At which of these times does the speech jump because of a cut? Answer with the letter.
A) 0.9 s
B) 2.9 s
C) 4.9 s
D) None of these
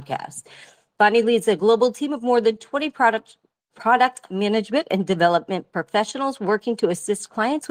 D